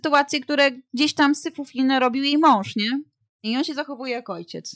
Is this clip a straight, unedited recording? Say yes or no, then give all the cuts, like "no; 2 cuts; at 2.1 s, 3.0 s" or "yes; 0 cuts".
yes; 0 cuts